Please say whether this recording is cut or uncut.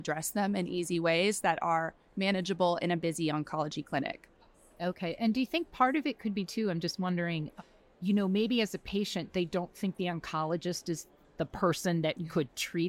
uncut